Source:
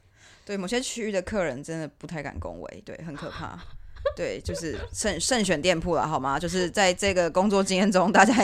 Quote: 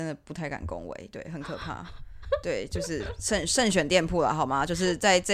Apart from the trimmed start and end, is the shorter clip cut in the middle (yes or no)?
no